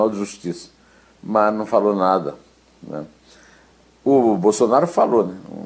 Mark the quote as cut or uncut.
uncut